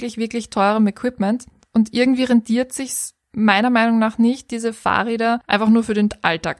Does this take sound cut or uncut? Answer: uncut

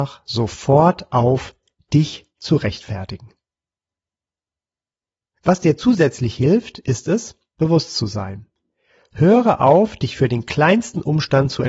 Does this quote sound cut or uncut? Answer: uncut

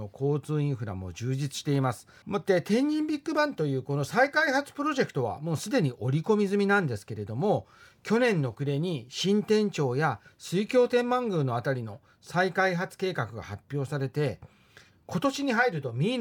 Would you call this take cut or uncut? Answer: cut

